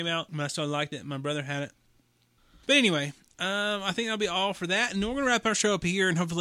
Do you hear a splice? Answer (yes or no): no